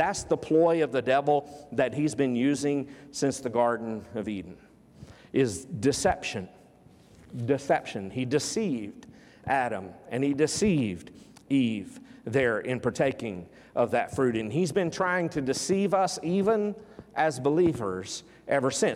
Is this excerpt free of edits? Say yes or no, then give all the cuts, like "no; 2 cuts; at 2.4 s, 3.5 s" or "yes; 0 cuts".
yes; 0 cuts